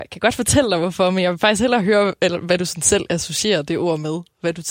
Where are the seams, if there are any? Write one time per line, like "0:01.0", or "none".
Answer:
none